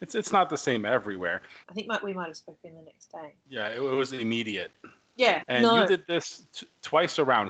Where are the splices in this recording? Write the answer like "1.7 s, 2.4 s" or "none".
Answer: 1.6 s, 5.4 s